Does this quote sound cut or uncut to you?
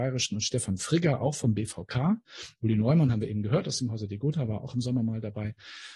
uncut